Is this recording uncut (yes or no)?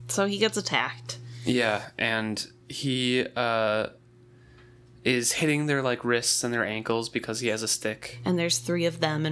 yes